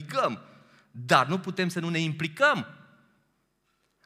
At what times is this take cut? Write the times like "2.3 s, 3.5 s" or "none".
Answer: none